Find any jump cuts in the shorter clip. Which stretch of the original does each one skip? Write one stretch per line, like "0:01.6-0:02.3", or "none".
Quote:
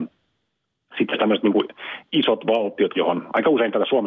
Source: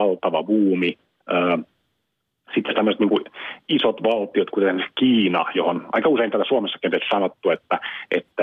0:04.5-0:05.5